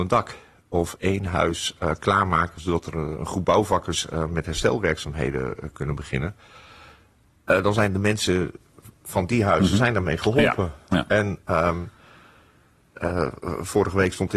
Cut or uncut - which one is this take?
uncut